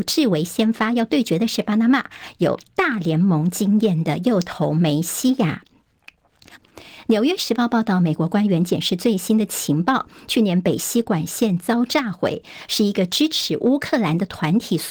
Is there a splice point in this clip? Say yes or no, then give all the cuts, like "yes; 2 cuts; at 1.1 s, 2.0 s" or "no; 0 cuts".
yes; 1 cut; at 6.6 s